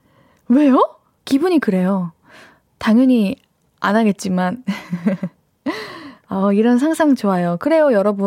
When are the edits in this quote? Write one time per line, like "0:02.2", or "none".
0:01.2